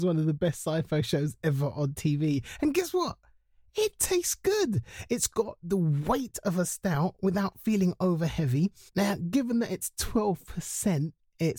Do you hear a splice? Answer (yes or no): yes